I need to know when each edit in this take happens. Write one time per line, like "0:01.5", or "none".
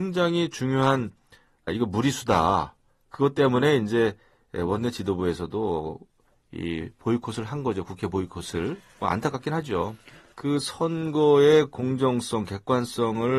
0:01.7
0:10.3